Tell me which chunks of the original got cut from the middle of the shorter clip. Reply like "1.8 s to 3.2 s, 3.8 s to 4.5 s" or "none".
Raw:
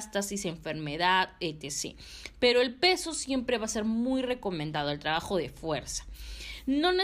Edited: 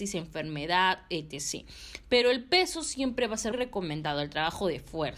3.8 s to 4.2 s